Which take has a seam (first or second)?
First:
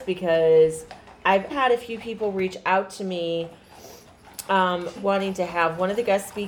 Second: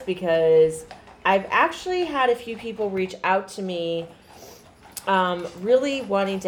first